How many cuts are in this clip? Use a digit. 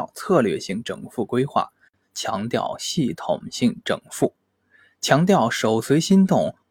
1